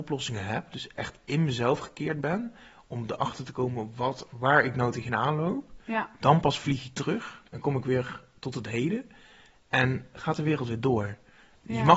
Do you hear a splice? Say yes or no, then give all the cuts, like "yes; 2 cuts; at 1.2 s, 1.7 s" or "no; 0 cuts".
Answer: no; 0 cuts